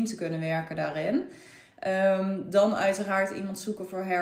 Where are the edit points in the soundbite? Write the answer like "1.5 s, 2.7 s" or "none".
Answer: none